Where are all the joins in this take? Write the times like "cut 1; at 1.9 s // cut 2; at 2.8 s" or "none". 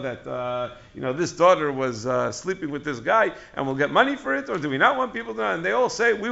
none